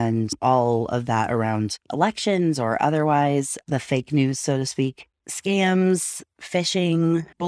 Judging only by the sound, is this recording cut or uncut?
uncut